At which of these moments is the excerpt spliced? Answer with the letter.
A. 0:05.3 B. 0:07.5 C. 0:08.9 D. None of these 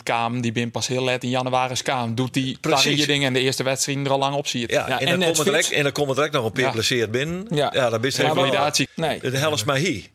C